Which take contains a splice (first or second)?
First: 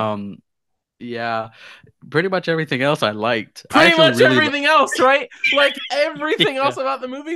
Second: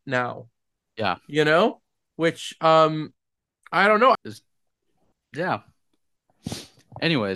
second